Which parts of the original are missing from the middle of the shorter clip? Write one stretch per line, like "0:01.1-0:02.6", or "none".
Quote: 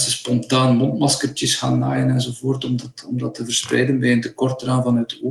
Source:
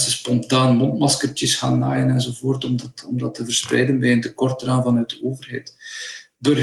none

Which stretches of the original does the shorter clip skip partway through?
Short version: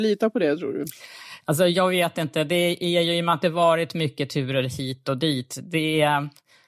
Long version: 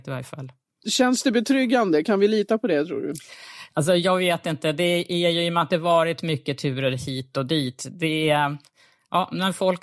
none

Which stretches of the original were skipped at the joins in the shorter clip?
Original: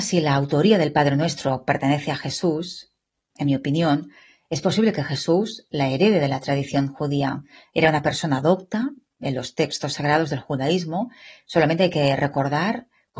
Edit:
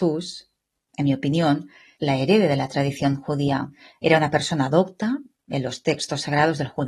0:04.4-0:05.7

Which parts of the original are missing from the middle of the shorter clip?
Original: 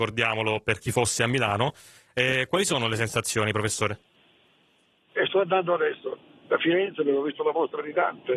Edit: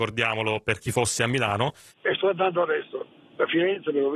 0:01.9-0:05.0

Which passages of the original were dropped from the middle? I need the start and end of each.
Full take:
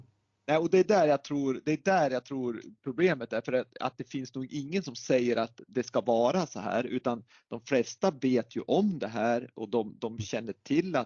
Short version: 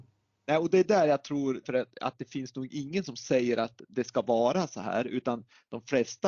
0:01.6-0:03.4

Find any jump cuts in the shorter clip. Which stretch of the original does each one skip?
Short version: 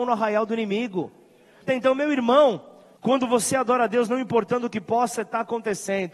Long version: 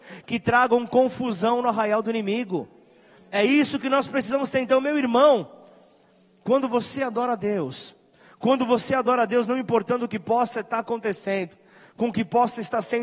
0:03.2-0:04.5
0:05.8-0:08.3

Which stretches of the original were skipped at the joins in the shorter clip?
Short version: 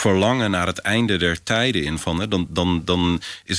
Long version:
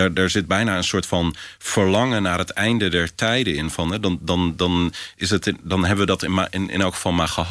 none

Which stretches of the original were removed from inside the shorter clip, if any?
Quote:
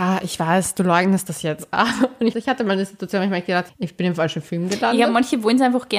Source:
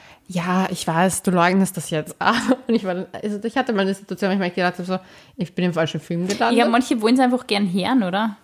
0:02.8-0:03.4
0:04.8-0:05.3

